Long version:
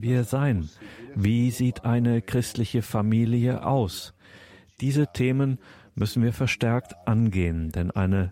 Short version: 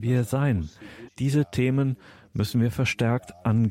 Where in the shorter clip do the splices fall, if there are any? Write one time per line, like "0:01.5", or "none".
0:01.1